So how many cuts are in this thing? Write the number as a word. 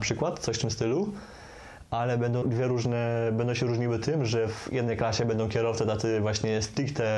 one